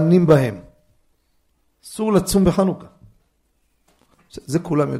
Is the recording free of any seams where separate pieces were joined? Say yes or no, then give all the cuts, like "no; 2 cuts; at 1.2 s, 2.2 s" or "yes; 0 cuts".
yes; 0 cuts